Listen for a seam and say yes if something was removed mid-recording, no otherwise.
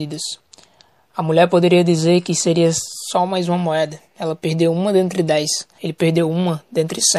yes